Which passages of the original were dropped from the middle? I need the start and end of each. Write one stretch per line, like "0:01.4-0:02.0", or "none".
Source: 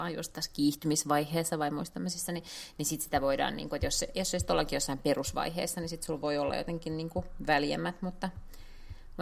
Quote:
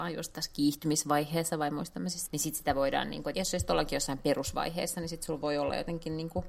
0:02.3-0:02.7
0:03.8-0:04.1